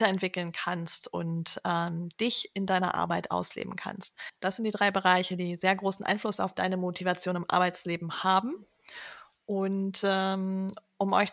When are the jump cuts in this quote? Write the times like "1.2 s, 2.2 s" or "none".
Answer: none